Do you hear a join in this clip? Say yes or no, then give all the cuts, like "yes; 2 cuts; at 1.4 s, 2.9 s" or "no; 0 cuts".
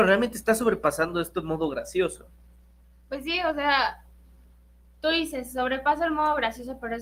no; 0 cuts